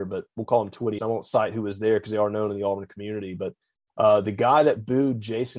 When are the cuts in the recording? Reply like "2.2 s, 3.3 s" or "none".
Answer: 1.0 s